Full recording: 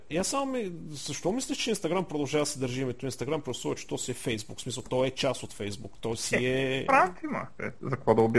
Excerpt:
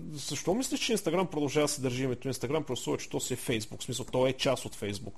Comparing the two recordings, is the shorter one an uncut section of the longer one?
yes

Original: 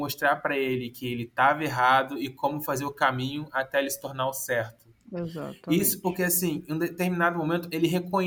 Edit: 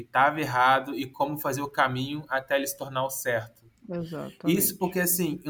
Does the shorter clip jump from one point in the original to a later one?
no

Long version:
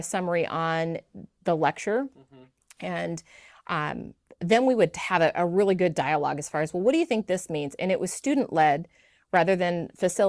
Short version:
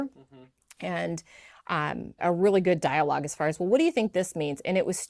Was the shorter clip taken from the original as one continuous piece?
no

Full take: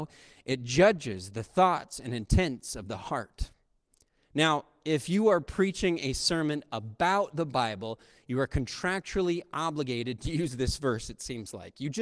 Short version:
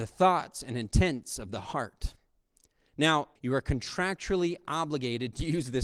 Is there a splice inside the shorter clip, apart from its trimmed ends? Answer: yes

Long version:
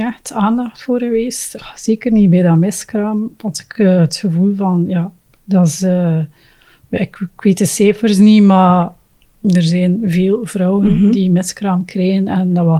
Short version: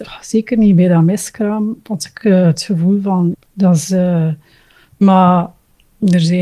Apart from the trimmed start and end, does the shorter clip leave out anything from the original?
yes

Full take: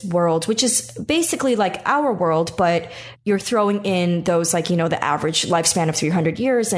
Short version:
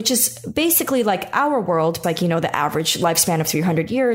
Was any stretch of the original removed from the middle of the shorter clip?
yes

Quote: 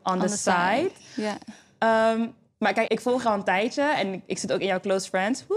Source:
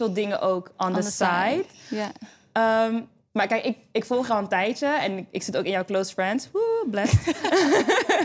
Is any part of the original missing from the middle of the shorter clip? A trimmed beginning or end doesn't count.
yes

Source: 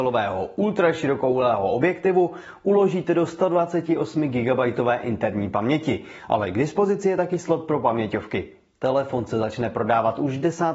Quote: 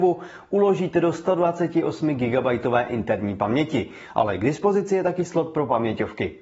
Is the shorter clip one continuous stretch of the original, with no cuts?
yes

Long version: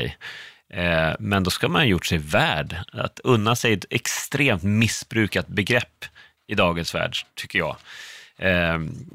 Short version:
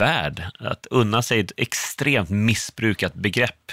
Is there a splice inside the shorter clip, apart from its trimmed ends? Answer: no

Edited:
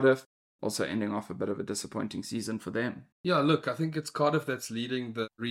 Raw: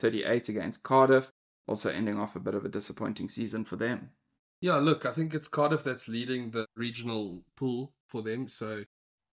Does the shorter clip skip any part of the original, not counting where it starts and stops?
yes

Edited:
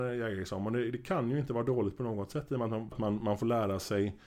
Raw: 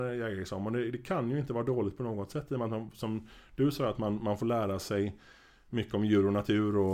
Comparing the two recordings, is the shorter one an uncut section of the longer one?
no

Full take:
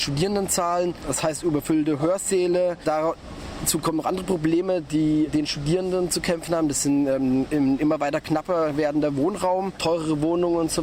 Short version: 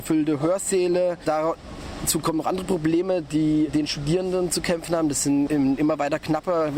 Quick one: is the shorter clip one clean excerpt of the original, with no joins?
no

